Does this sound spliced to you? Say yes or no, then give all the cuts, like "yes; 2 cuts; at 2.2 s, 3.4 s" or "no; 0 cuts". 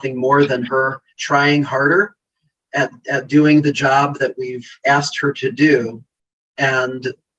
yes; 1 cut; at 1.1 s